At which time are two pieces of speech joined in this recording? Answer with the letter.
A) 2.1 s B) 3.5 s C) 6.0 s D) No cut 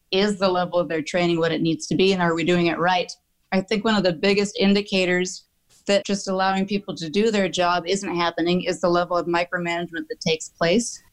C